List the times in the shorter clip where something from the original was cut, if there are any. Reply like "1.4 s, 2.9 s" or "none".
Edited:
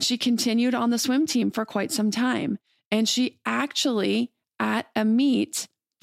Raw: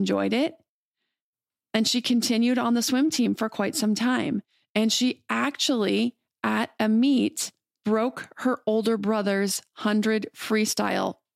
none